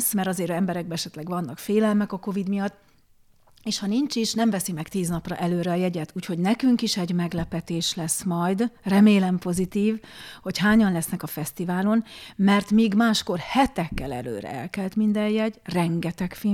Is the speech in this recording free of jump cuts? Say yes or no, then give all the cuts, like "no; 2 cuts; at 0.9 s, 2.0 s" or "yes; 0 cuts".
yes; 0 cuts